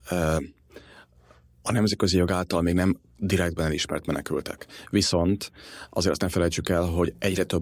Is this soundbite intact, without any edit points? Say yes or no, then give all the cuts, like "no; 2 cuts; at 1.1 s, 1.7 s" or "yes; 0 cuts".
yes; 0 cuts